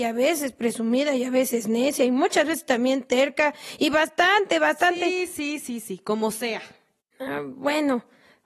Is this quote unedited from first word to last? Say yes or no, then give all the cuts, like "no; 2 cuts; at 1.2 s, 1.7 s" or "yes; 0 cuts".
yes; 0 cuts